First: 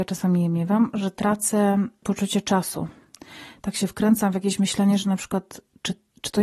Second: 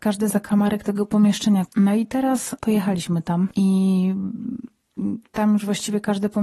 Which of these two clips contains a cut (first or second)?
second